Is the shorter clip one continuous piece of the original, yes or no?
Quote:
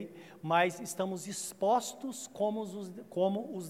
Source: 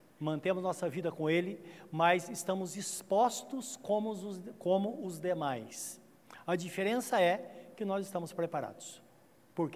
yes